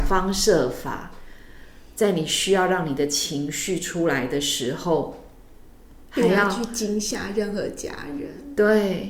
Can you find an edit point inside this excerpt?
no; 0 cuts

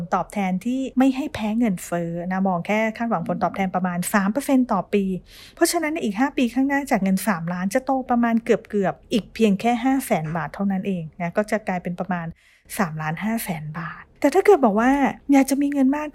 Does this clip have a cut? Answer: yes; 1 cut; at 8.1 s

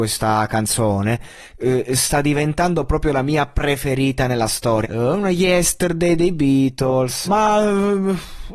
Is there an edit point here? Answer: yes; 2 cuts; at 4.8 s, 7.3 s

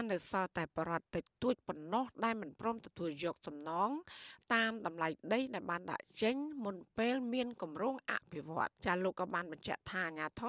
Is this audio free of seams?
no; 1 cut; at 8.8 s

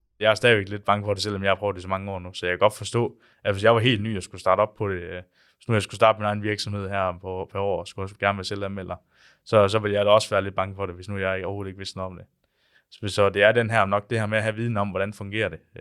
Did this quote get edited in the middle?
no; 0 cuts

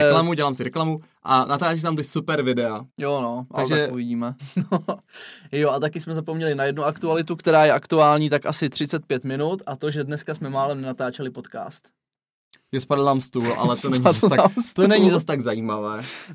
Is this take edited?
yes; 2 cuts; at 2.9 s, 4.4 s

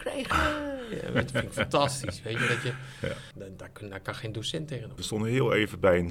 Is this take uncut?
no; 2 cuts; at 3.3 s, 5.0 s

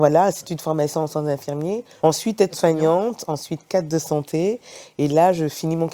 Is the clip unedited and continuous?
no; 2 cuts; at 2.0 s, 3.3 s

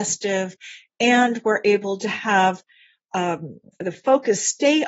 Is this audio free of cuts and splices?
yes; 0 cuts

